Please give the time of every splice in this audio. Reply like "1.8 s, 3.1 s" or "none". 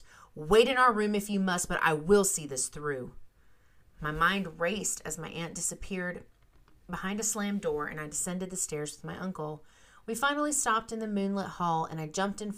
none